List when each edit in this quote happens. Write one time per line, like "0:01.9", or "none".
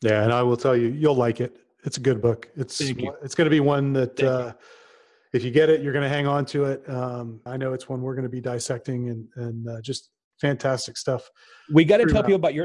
0:07.5